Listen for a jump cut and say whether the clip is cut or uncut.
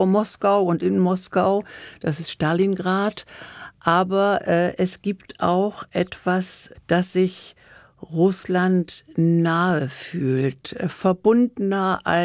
uncut